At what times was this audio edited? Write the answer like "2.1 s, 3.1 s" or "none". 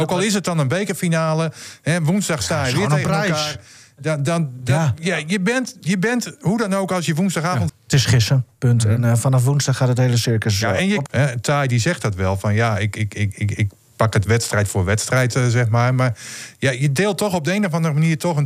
7.7 s, 11.1 s